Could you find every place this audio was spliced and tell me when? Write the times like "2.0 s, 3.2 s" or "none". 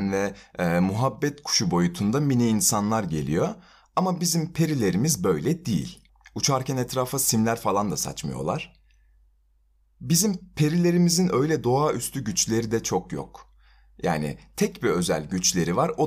none